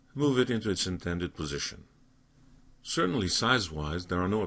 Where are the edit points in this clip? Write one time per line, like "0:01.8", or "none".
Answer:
0:02.7